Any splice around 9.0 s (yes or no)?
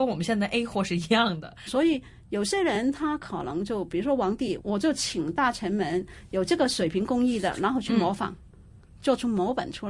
no